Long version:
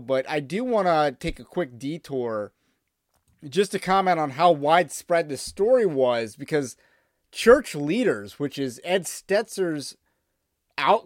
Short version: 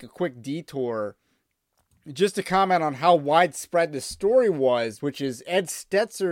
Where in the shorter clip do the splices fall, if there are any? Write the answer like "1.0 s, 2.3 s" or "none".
5.0 s